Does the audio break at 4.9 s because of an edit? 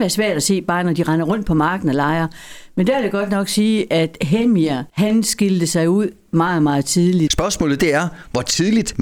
yes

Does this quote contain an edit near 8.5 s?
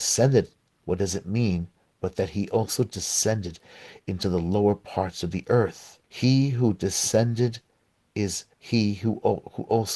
yes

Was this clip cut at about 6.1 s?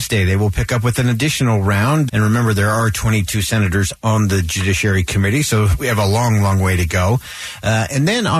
no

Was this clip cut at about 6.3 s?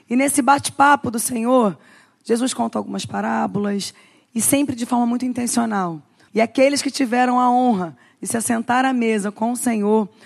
yes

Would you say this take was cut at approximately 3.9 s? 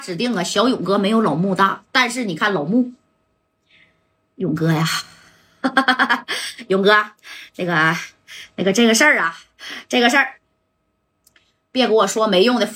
no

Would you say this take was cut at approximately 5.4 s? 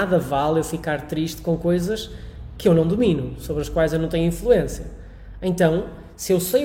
no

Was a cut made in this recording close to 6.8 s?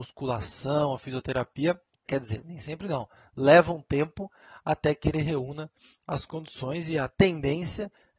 no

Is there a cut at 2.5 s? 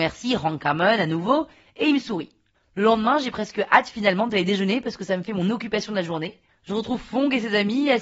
no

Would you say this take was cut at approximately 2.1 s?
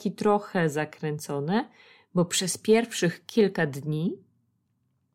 no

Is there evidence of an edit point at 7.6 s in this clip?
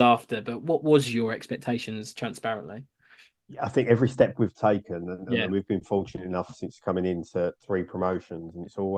yes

